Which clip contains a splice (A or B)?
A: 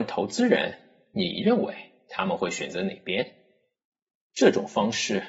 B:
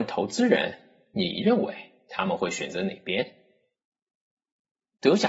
A